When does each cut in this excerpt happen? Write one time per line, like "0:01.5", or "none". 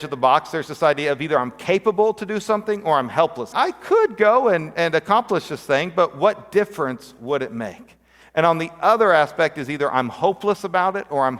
0:03.5
0:08.2